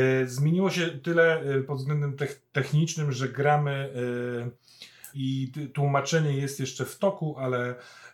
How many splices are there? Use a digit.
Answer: 1